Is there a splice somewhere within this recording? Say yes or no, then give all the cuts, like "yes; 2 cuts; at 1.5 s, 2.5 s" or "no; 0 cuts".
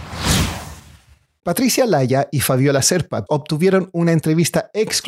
yes; 2 cuts; at 1.4 s, 3.3 s